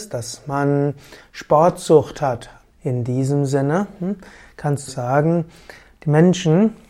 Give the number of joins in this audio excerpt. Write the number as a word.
two